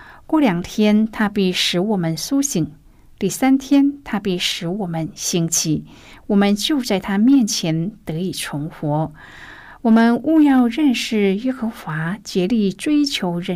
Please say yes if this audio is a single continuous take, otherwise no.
yes